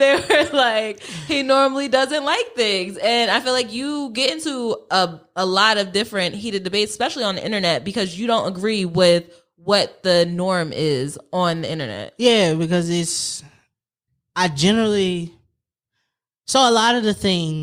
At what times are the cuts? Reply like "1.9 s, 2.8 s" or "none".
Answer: none

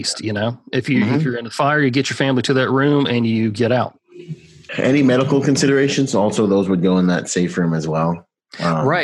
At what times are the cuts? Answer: 4.7 s

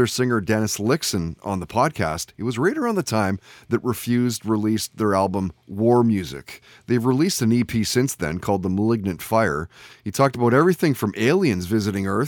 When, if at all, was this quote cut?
none

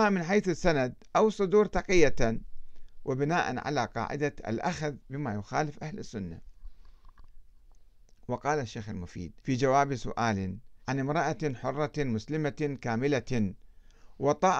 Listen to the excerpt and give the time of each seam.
9.4 s, 10.8 s

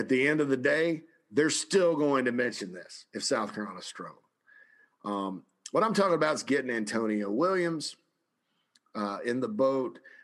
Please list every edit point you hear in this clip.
none

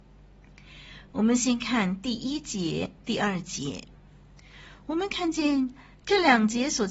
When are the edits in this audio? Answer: none

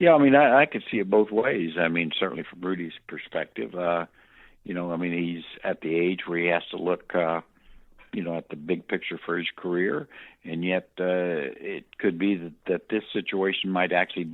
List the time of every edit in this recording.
none

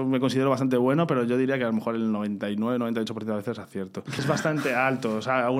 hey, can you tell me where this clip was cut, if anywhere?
4.2 s

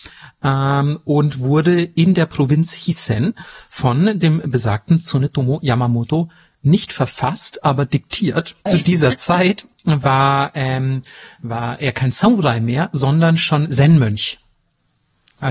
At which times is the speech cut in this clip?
8.7 s

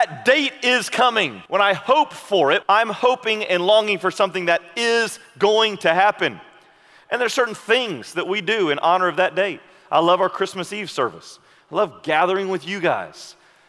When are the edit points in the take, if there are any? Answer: 1.5 s, 2.6 s

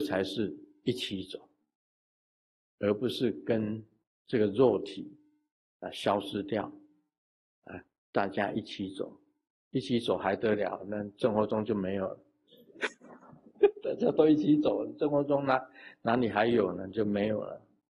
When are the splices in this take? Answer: none

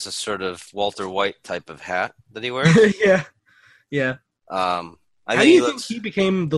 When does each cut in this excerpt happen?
none

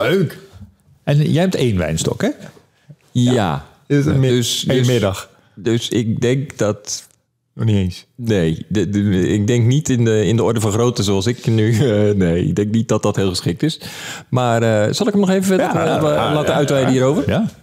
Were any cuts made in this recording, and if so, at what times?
none

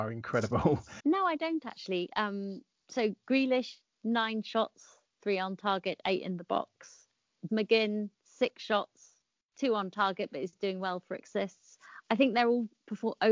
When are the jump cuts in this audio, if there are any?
1.0 s, 7.5 s

